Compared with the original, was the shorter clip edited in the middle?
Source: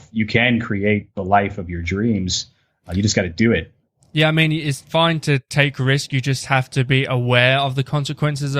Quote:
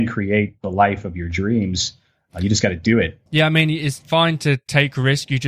yes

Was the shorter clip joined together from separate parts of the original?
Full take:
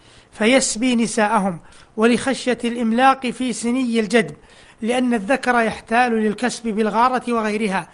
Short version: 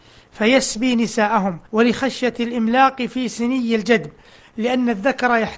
yes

